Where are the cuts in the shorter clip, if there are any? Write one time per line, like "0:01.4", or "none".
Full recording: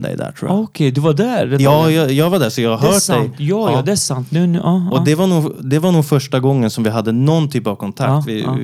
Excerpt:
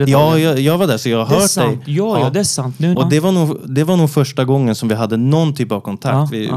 0:02.9